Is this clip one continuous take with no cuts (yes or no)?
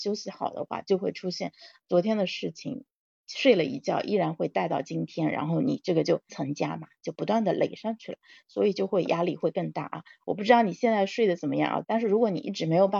no